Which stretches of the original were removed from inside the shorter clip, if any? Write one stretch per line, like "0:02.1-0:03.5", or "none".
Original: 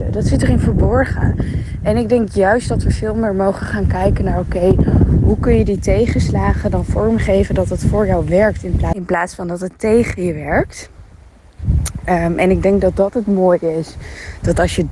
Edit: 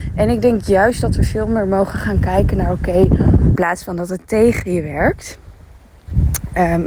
0:05.2-0:09.1